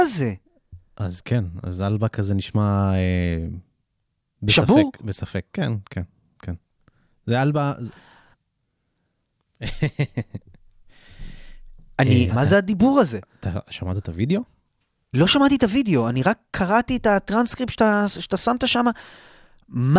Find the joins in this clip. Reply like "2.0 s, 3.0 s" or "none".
8.3 s, 12.3 s